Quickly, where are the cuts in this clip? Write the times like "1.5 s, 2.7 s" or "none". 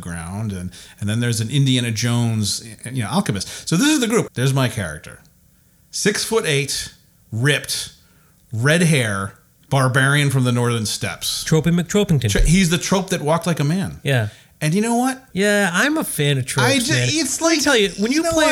4.3 s, 15.3 s

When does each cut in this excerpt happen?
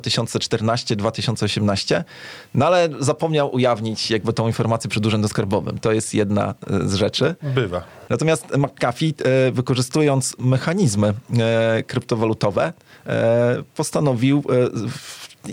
8.1 s

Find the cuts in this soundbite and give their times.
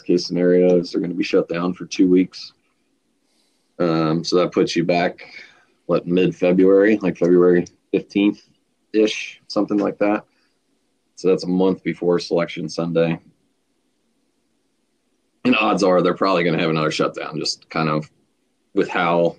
none

